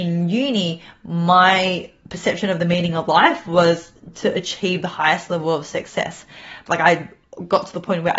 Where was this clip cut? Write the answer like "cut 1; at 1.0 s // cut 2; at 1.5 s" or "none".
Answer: cut 1; at 6.7 s